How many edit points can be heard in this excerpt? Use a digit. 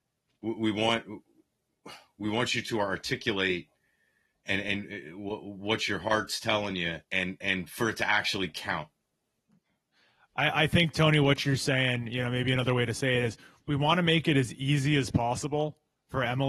1